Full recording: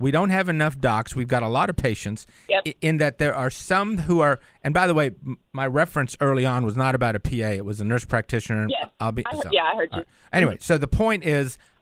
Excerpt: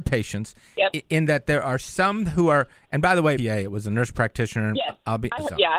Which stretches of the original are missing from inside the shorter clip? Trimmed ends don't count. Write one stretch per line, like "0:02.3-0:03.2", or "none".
0:05.1-0:07.3